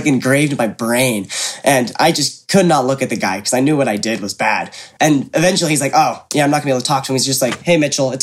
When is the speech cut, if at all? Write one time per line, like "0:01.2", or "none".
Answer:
none